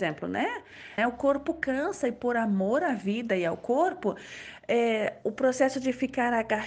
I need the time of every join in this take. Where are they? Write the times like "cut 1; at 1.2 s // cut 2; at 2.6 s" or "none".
cut 1; at 1.0 s